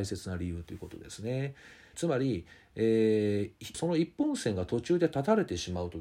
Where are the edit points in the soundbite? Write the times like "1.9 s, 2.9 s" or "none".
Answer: 1.9 s, 3.7 s